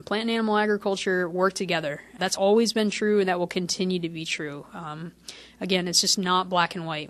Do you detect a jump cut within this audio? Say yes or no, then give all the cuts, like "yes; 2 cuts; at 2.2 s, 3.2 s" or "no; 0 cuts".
yes; 1 cut; at 2.2 s